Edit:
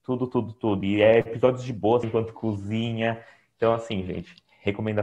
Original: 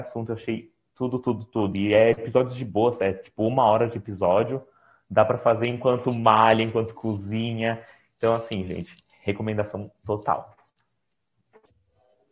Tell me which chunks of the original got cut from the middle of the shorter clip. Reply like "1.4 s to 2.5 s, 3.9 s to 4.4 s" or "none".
2.9 s to 6.6 s